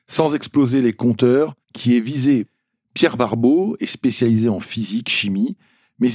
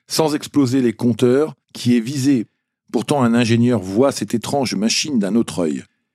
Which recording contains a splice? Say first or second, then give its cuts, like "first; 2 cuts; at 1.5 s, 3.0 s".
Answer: first; 1 cut; at 2.7 s